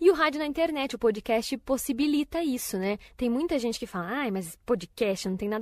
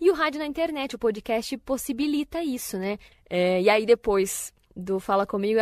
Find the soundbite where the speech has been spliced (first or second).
second